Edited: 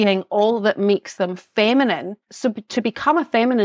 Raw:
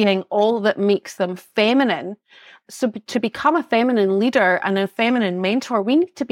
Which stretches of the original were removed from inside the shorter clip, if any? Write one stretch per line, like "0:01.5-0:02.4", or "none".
0:02.2-0:02.6

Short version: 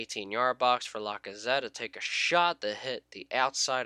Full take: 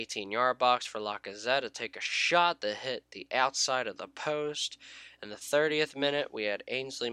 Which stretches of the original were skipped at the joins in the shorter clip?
none

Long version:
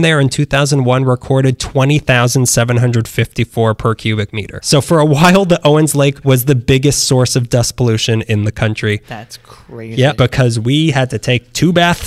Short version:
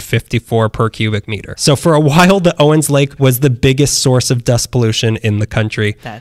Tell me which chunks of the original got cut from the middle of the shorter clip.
none

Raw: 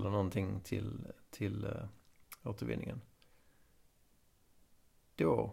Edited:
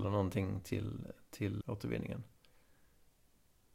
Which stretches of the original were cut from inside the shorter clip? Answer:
0:01.6-0:02.4

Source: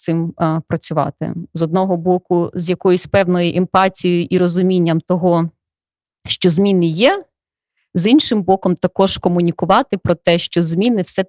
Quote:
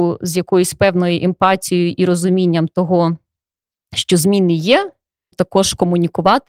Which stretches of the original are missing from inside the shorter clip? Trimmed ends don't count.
0:07.6-0:08.8

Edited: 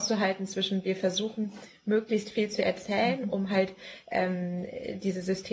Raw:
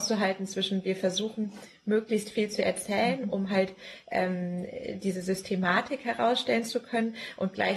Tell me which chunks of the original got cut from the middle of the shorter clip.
none

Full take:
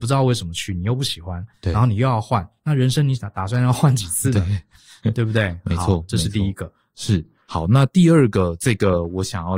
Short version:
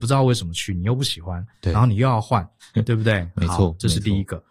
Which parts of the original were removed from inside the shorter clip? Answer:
0:02.6-0:04.9

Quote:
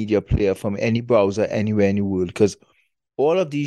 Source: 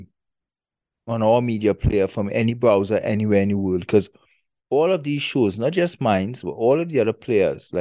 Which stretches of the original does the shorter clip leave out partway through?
none

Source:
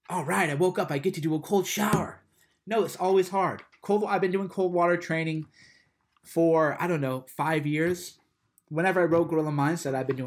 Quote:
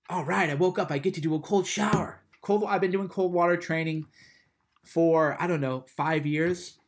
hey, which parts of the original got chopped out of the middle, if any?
0:02.3-0:03.7

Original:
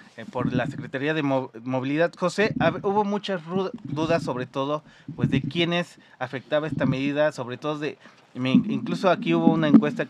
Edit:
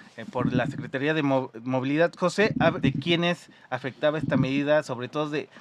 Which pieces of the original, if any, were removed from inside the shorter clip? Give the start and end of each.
0:02.8-0:05.3

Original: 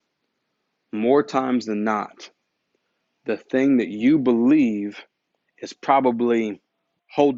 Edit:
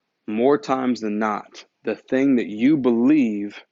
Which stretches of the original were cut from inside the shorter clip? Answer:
0:02.4-0:03.1

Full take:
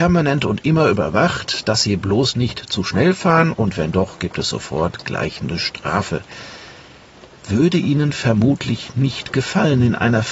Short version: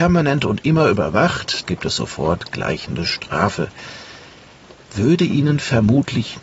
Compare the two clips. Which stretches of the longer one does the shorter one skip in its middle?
0:01.6-0:04.2

